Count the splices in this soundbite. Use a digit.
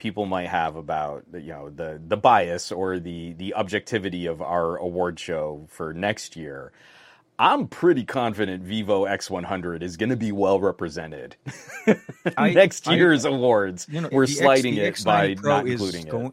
1